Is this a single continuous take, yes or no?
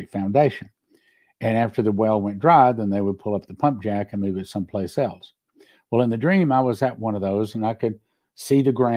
yes